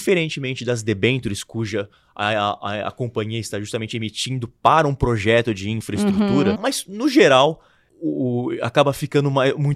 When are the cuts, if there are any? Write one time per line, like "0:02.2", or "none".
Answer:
0:06.6
0:07.9